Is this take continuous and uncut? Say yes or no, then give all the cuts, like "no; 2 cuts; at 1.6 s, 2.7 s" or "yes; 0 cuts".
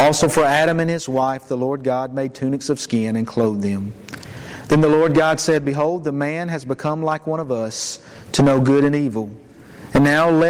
yes; 0 cuts